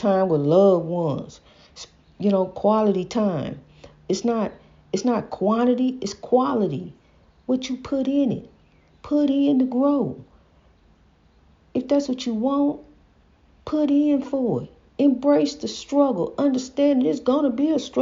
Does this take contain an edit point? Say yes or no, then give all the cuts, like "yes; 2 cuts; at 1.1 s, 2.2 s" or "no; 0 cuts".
no; 0 cuts